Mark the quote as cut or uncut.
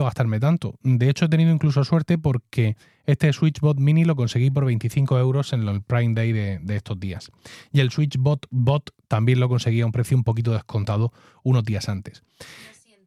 uncut